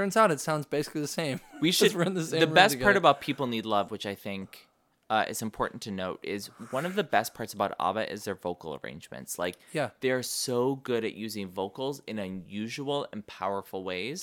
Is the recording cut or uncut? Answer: uncut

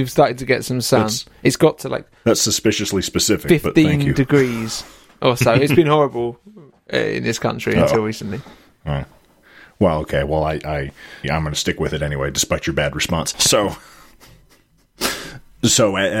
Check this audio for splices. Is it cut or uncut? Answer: cut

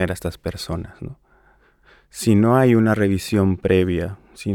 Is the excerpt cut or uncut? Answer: uncut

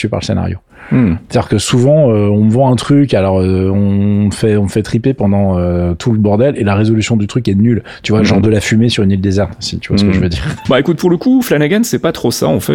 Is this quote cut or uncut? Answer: cut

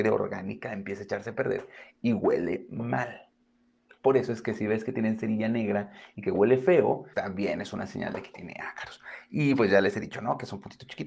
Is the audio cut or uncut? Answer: cut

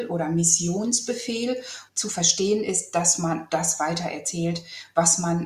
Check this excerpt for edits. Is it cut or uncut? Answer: cut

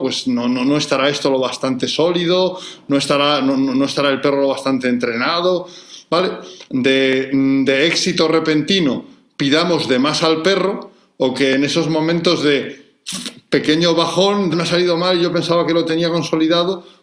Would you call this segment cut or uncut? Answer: cut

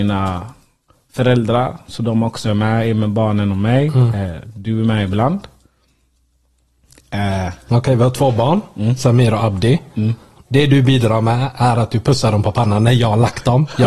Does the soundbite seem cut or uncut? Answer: cut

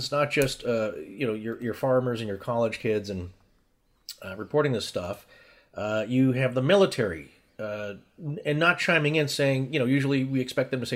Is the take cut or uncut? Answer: uncut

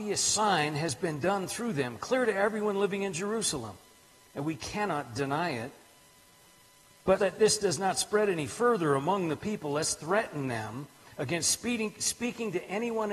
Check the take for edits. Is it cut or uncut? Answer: cut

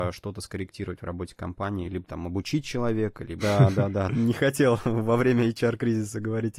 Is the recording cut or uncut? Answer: cut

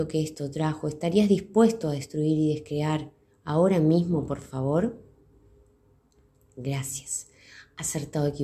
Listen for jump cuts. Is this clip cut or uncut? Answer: uncut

